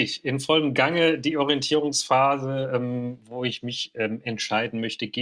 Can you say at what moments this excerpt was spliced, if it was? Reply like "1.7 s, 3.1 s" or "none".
none